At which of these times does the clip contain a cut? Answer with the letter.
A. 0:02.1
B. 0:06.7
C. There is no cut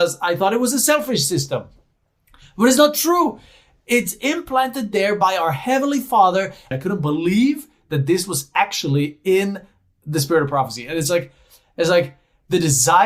B